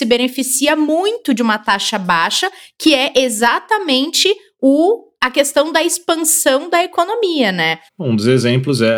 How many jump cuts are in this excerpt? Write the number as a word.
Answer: one